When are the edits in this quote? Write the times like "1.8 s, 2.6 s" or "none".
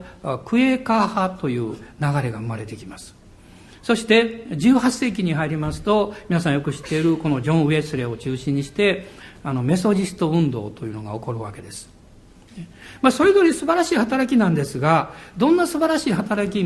none